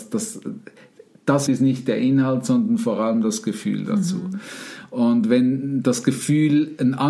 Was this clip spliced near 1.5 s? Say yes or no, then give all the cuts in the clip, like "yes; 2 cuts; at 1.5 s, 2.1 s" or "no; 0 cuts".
yes; 1 cut; at 1.5 s